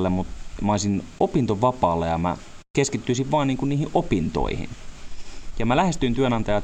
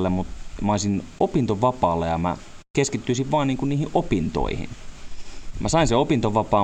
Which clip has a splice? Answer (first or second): second